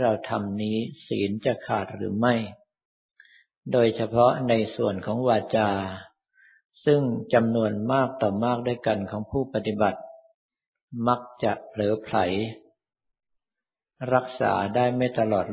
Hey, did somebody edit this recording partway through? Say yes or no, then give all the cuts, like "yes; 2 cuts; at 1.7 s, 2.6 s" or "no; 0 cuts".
no; 0 cuts